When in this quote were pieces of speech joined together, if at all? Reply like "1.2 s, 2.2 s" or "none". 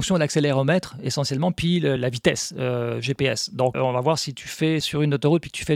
2.0 s, 3.7 s, 4.8 s